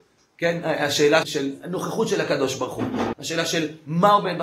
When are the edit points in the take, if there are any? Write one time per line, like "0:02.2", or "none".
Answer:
0:01.2
0:03.1